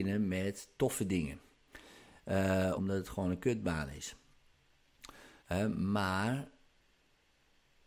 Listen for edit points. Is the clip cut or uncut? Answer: cut